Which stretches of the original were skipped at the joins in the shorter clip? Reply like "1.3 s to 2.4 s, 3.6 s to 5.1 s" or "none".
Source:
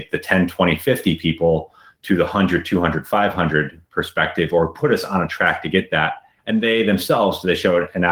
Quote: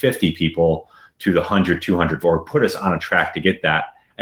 3.0 s to 4.5 s